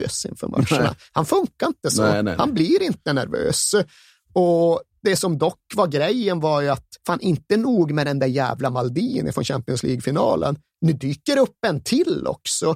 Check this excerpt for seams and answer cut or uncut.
cut